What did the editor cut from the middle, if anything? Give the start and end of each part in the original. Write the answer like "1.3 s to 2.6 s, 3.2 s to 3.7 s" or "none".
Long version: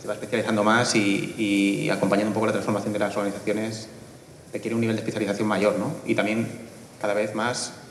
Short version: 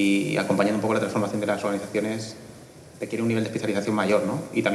none

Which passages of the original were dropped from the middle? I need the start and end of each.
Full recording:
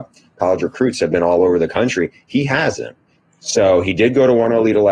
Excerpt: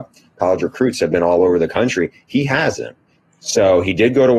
none

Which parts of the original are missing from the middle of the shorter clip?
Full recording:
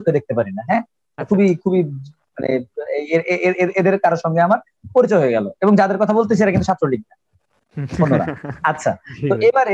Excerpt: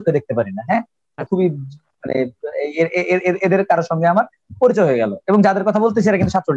1.3 s to 1.6 s

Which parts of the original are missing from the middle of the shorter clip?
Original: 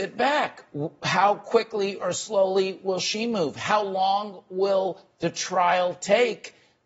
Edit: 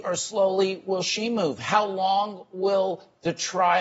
none

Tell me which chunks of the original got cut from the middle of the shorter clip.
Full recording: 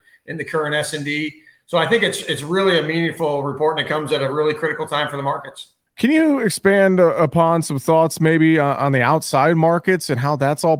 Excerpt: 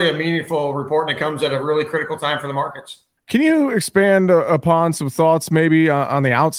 none

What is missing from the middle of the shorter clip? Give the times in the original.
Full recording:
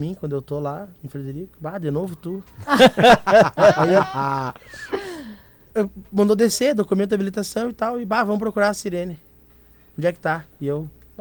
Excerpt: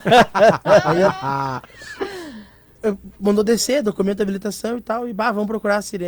none

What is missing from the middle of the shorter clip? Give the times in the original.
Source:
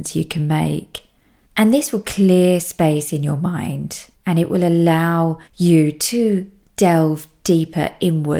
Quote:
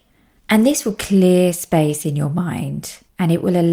none

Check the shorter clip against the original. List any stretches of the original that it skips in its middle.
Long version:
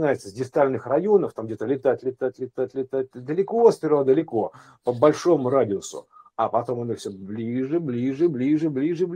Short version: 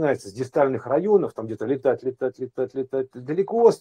none

